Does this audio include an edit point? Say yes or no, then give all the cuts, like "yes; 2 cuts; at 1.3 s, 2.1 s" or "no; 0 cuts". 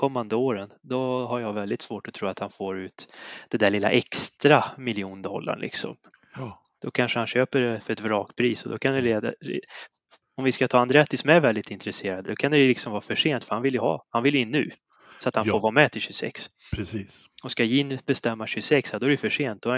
no; 0 cuts